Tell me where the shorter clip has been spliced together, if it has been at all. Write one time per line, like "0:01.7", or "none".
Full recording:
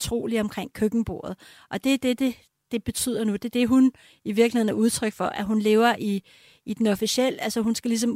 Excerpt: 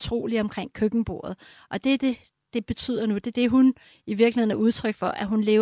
0:02.0